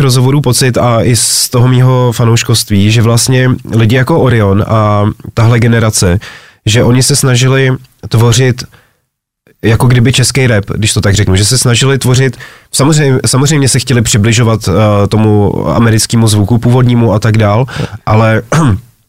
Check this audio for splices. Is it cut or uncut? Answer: uncut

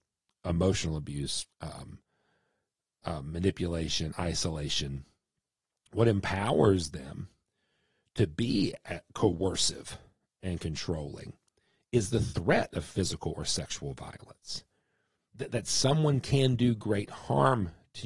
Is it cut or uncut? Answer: cut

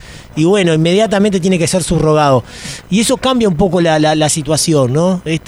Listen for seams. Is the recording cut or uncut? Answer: uncut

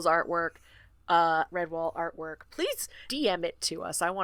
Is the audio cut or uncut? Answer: cut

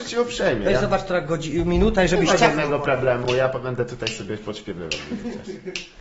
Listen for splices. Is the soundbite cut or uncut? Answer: uncut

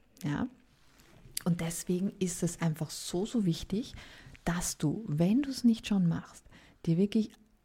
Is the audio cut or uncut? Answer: uncut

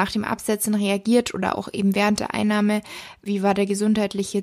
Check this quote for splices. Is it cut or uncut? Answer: cut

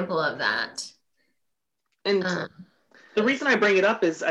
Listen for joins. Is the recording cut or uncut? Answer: cut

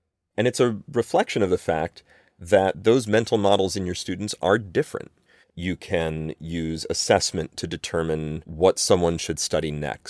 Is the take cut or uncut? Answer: cut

